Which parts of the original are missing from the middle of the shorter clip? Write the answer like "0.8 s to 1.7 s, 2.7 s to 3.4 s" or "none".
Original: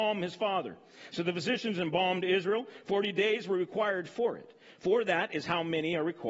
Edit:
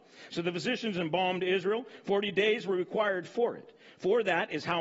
none